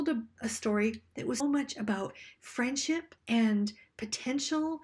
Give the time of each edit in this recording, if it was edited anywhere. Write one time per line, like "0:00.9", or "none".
0:01.4
0:03.2